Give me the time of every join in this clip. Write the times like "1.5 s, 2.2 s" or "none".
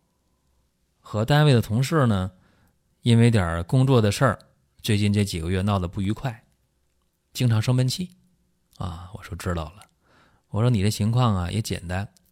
none